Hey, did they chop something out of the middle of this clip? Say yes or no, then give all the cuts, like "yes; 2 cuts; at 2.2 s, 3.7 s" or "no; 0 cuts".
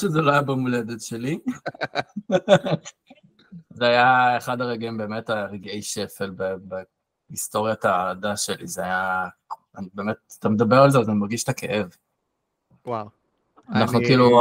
no; 0 cuts